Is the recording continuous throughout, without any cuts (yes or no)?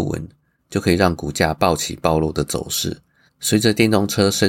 no